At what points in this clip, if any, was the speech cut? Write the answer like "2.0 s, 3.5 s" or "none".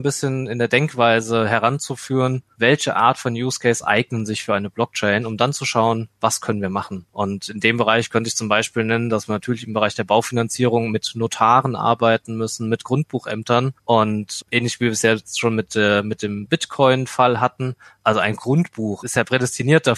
none